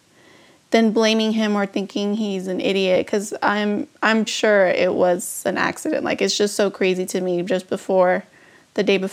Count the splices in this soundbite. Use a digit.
1